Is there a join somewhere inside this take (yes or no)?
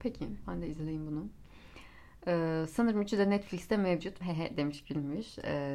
yes